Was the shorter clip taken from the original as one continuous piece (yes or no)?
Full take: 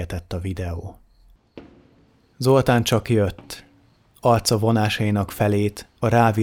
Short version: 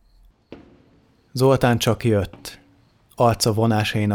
yes